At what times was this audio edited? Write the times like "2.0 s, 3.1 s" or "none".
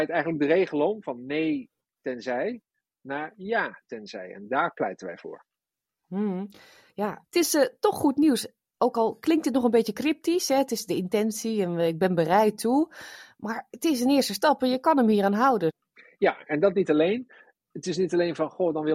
none